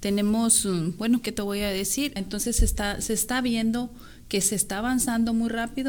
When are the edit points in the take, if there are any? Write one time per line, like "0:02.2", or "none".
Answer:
0:02.2